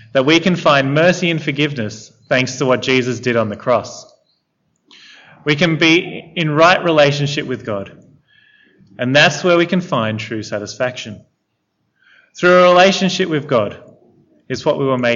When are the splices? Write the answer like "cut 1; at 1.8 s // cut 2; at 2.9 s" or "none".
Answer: none